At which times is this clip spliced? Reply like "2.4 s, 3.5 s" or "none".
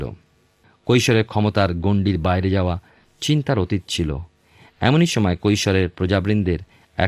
none